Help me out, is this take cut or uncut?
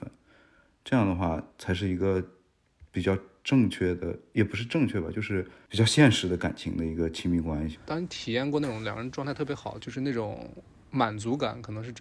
cut